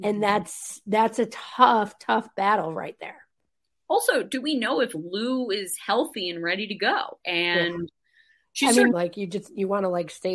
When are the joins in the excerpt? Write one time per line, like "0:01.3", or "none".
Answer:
0:07.2
0:08.9